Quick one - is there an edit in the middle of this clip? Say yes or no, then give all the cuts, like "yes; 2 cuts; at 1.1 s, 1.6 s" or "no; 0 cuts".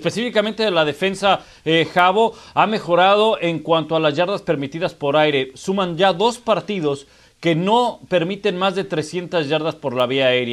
no; 0 cuts